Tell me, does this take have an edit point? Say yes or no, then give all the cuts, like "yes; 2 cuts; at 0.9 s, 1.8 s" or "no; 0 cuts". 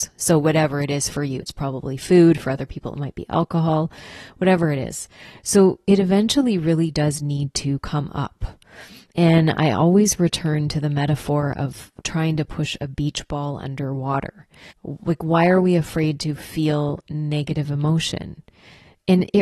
yes; 2 cuts; at 1.4 s, 14.7 s